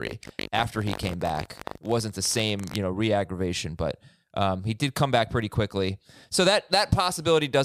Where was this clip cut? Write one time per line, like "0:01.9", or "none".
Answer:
none